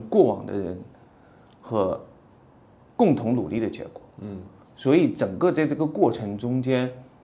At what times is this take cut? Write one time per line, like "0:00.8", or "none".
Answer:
none